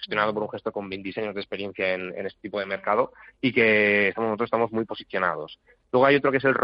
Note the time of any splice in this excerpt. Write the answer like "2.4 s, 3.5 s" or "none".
none